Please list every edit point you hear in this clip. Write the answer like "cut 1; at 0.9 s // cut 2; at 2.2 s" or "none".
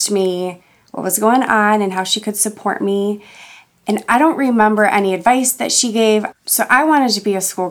cut 1; at 6.3 s